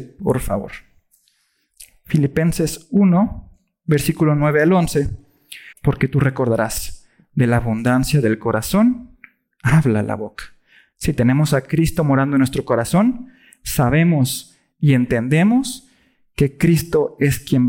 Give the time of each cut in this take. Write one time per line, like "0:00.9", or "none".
0:05.7